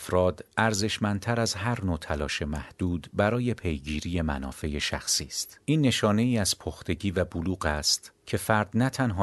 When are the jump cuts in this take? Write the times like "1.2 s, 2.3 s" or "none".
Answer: 5.6 s